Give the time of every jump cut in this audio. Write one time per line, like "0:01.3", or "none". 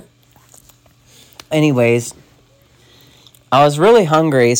0:01.5

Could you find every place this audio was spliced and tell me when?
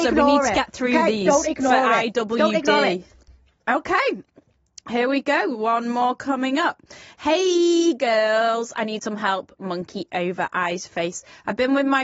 none

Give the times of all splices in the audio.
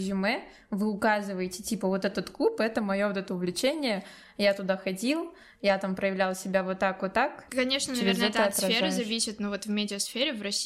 none

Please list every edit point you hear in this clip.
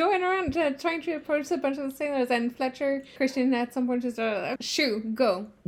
0:03.2
0:04.6

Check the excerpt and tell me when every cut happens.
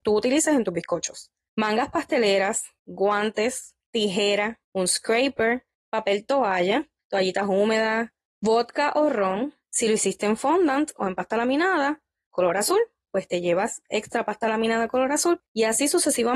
0:04.6
0:09.6

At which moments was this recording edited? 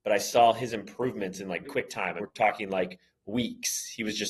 0:01.6

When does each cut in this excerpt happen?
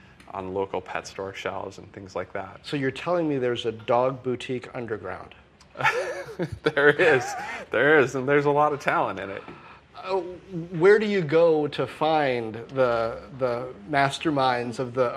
none

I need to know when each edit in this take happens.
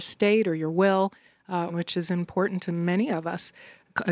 0:01.7

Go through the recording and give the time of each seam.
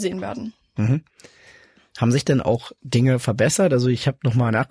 none

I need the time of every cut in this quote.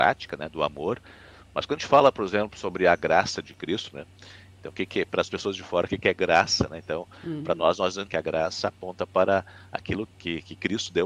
0:08.1
0:10.1

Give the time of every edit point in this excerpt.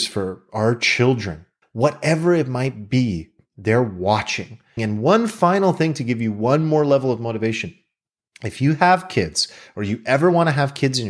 0:01.6
0:04.8

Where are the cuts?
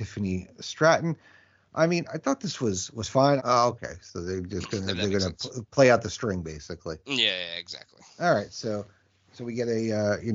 0:03.4

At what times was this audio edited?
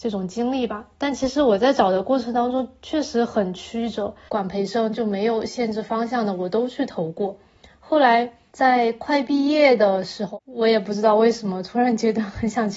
0:04.3

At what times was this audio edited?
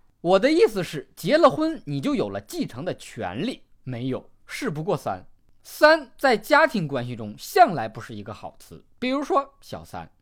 0:03.8

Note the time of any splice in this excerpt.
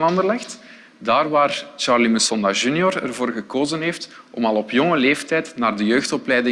none

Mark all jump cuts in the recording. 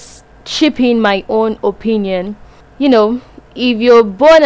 none

